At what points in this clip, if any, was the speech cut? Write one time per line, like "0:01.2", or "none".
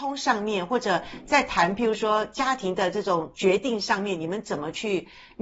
none